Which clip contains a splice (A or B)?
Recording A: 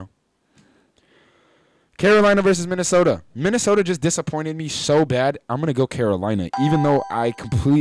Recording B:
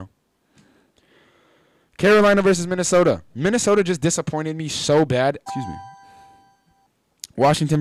B